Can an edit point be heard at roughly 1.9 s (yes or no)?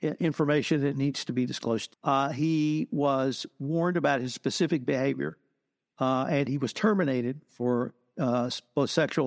yes